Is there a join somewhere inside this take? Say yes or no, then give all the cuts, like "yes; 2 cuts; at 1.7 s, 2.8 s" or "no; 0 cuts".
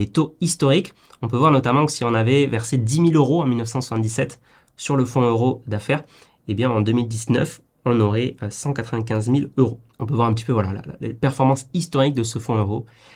no; 0 cuts